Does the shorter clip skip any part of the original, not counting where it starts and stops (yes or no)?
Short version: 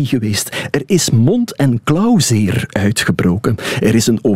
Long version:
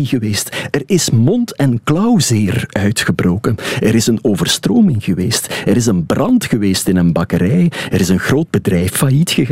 no